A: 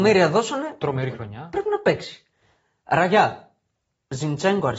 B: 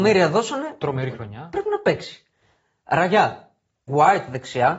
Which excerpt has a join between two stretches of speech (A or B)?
B